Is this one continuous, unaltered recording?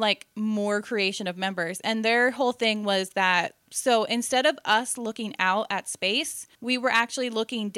no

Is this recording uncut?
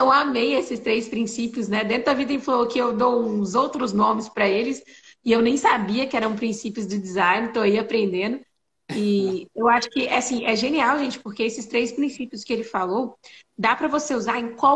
yes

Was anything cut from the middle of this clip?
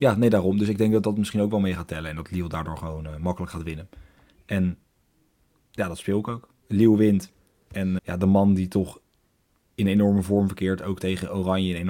yes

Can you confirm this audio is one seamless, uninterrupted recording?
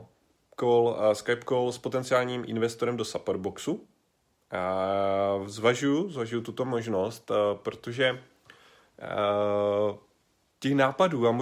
yes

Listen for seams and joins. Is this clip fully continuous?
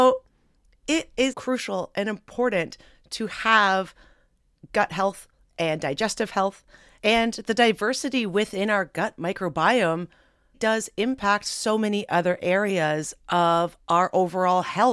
no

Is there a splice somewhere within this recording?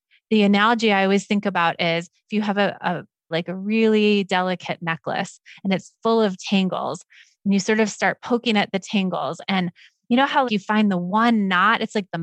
yes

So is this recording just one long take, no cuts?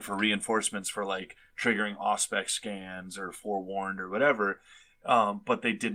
yes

